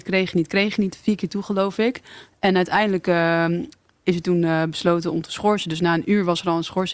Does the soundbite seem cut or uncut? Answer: uncut